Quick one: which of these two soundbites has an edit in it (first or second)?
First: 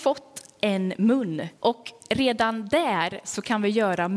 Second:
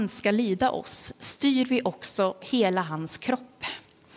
first